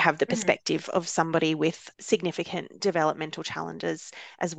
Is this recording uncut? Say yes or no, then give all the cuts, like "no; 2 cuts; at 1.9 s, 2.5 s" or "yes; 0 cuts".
yes; 0 cuts